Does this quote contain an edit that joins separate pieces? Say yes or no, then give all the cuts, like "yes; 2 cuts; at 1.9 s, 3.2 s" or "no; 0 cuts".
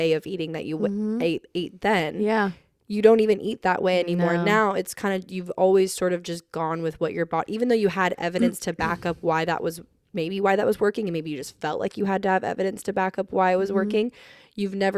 no; 0 cuts